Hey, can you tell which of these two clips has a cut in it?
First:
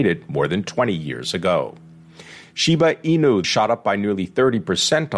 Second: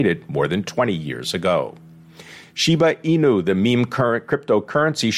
first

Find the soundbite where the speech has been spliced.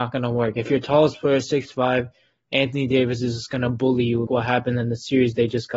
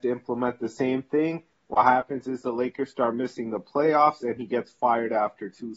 first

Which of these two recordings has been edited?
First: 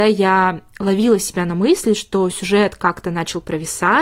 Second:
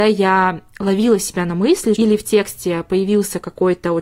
second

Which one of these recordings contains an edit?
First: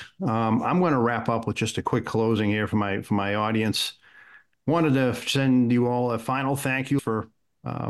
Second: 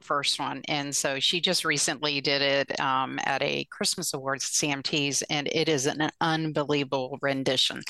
first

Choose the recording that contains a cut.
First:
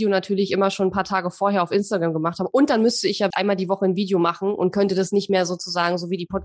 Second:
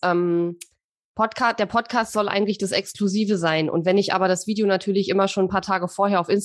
first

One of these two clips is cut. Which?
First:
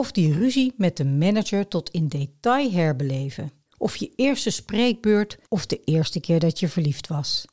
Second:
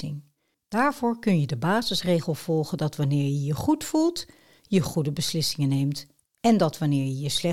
first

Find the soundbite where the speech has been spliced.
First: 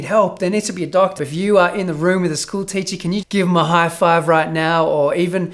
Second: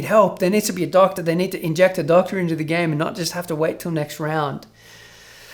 first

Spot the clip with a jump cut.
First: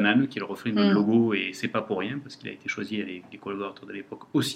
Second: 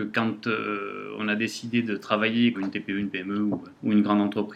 second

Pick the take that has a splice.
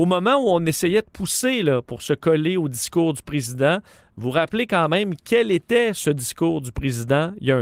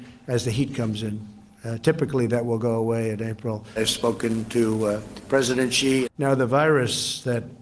second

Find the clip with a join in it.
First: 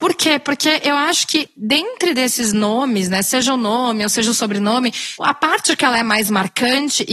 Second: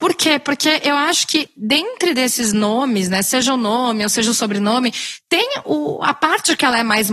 first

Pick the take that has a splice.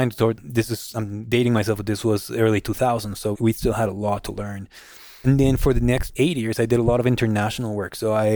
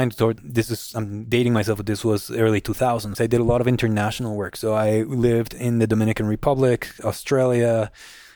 second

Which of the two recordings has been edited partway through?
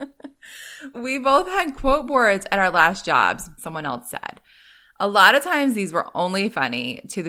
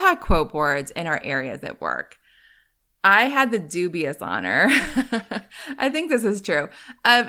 first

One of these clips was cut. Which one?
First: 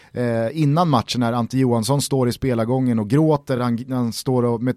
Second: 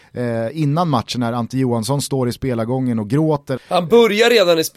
second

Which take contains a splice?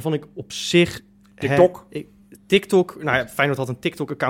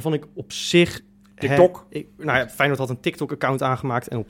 second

